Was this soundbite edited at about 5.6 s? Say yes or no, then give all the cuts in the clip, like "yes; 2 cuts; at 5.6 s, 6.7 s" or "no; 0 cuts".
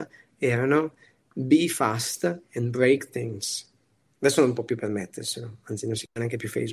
no; 0 cuts